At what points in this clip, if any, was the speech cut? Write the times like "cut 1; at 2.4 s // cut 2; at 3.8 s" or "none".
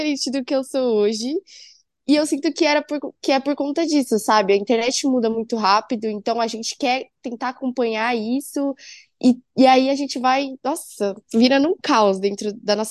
none